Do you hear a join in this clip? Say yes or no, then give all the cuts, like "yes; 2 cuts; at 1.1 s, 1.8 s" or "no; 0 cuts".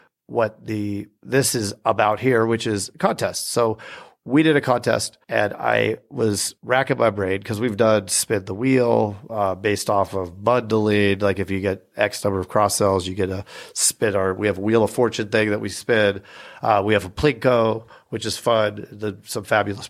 no; 0 cuts